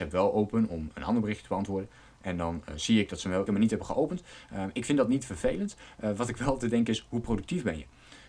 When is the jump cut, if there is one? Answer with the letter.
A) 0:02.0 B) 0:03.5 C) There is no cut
B